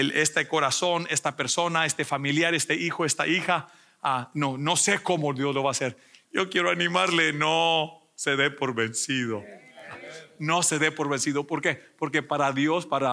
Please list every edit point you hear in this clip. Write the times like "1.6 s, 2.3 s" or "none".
6.2 s